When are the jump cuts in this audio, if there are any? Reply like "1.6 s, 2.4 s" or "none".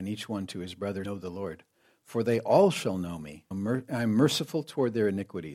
1.1 s, 3.5 s